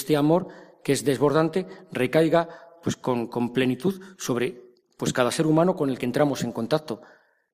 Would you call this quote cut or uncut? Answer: uncut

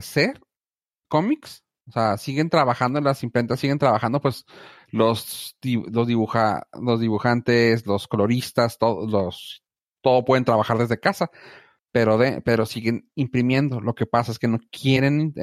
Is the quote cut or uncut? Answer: uncut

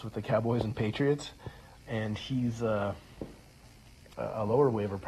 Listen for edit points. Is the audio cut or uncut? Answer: cut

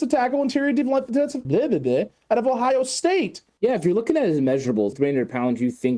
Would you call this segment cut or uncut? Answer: cut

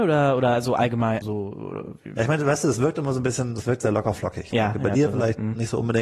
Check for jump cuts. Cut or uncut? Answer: cut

